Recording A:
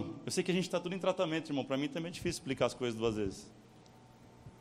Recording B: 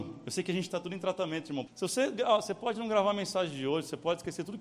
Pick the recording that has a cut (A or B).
B